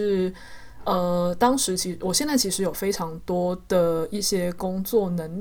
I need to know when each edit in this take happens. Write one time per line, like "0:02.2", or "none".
none